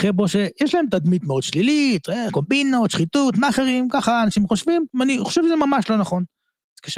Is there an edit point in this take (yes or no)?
yes